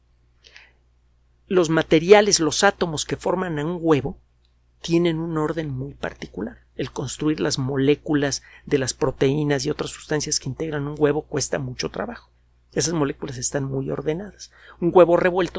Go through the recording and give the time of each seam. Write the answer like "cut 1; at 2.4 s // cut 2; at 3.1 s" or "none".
none